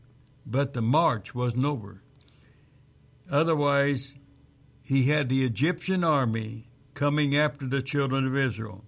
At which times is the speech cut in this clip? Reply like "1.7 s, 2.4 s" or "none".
none